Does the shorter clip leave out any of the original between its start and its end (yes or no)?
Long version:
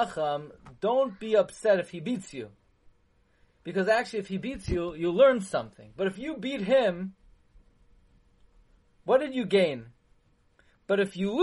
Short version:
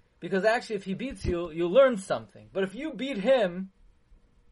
no